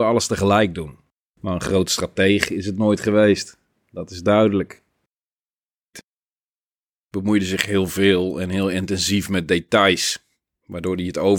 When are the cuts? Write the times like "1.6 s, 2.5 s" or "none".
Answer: 1.3 s, 5.9 s